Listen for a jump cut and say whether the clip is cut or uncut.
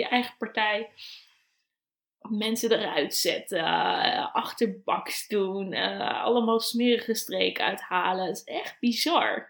uncut